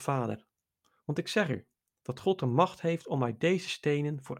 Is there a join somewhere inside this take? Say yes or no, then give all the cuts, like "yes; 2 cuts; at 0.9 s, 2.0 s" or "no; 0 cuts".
no; 0 cuts